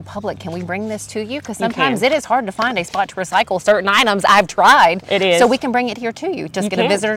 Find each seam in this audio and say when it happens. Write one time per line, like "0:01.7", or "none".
none